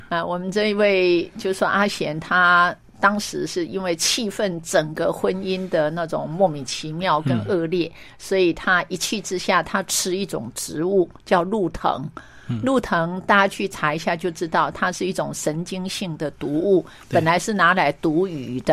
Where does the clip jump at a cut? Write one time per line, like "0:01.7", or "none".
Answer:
none